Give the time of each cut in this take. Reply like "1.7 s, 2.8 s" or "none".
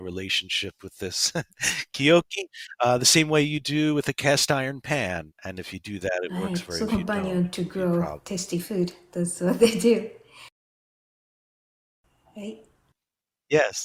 5.3 s, 6.9 s